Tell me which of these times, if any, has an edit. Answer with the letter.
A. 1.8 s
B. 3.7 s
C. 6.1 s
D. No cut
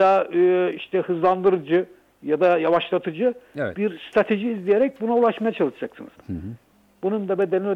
C